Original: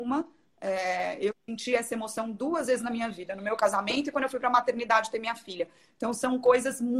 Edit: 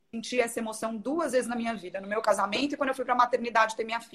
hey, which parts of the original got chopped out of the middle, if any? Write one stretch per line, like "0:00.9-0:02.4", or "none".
none